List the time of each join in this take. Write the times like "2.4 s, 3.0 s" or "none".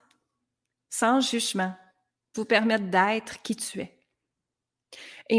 2.3 s